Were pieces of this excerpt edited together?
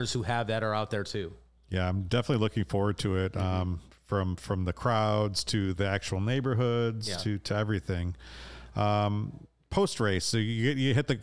no; 0 cuts

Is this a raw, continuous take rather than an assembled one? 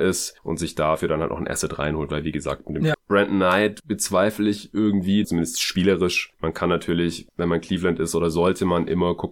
no; 2 cuts; at 2.9 s, 5.2 s

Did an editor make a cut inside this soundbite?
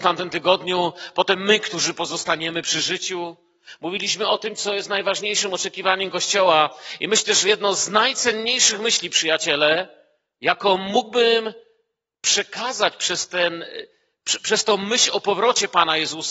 no; 0 cuts

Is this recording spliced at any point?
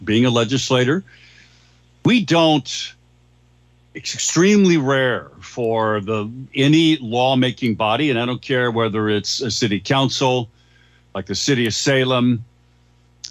no; 0 cuts

